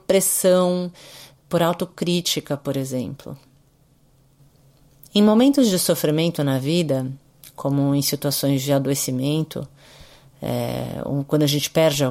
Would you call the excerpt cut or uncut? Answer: uncut